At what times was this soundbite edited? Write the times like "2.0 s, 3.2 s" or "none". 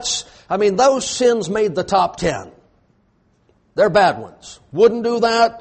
none